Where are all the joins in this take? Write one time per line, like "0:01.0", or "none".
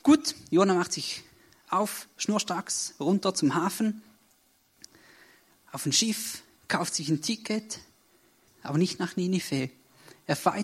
0:08.5